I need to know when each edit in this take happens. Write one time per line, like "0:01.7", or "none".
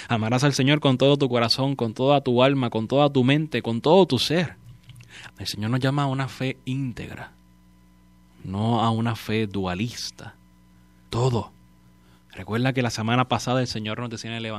0:05.3
0:11.1